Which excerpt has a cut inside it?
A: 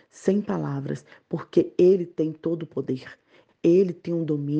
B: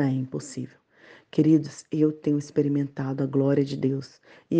A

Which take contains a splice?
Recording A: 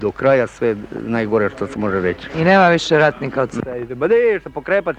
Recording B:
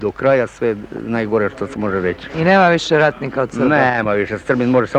A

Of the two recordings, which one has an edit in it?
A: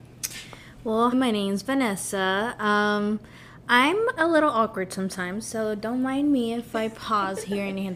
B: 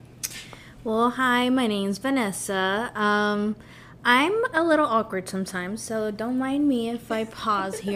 A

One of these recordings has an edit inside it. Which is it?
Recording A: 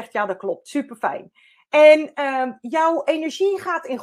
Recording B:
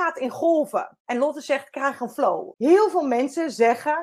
B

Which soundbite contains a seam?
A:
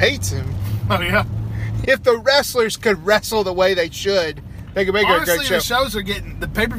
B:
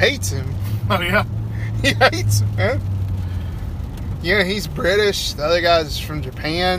A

